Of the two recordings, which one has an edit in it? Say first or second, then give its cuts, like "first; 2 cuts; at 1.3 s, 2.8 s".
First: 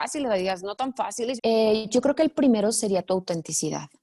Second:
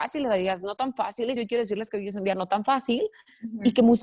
first; 1 cut; at 1.4 s